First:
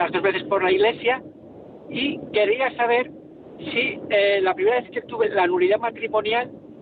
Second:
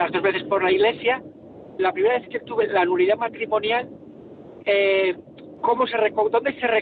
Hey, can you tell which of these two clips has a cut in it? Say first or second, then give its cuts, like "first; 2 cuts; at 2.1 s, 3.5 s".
second; 2 cuts; at 1.8 s, 5.6 s